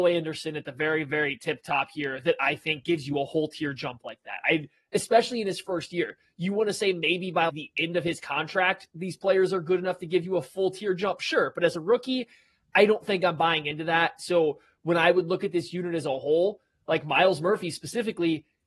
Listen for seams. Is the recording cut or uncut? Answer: cut